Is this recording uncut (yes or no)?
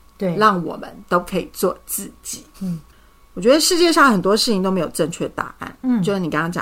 no